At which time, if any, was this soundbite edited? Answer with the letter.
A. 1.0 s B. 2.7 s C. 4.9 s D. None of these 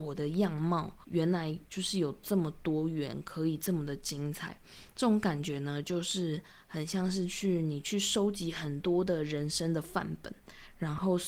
D